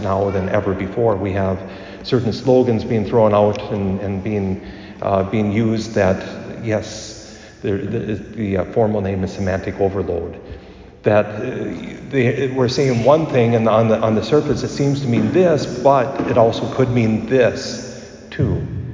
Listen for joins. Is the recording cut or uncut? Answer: uncut